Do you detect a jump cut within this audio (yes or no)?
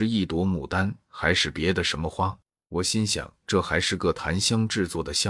yes